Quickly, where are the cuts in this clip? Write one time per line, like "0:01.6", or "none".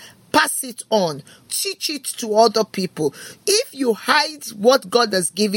0:01.5
0:03.4